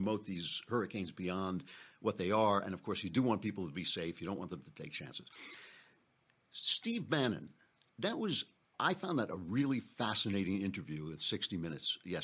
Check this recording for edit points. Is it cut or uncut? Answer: cut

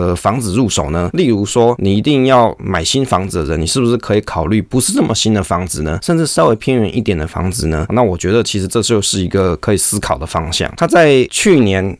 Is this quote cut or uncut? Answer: cut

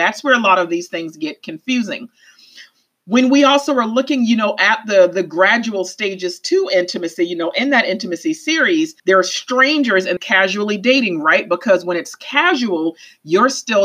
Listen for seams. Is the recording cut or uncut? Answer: cut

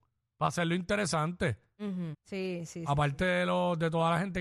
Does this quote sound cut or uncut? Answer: cut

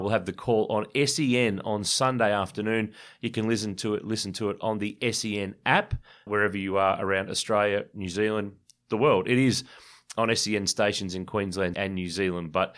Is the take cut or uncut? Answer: cut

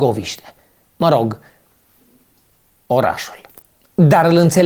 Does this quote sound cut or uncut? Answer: uncut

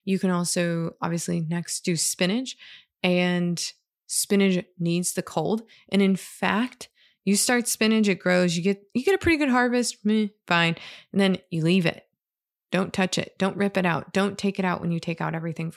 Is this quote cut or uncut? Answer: uncut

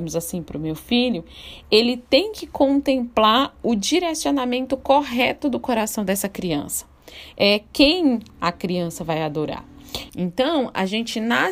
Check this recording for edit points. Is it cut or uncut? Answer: cut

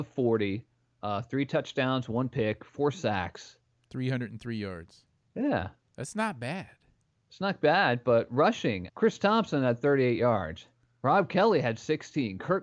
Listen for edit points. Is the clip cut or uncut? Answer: cut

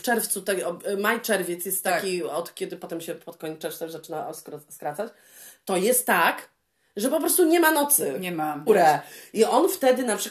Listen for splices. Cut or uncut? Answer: cut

